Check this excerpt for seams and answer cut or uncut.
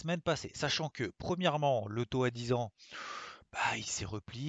uncut